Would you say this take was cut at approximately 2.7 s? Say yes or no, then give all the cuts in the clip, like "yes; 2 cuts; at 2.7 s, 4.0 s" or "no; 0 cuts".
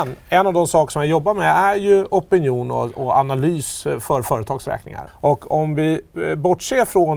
no; 1 cut; at 5.1 s